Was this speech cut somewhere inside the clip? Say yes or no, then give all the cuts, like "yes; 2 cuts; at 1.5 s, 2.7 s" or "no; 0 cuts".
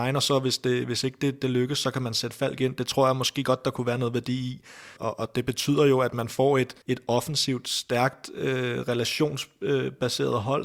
yes; 2 cuts; at 5.0 s, 6.8 s